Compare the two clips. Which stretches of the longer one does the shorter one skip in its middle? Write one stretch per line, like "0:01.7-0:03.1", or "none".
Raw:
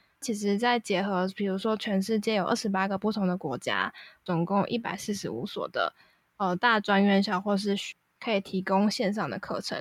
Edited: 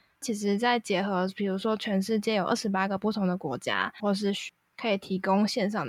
0:04.0-0:07.4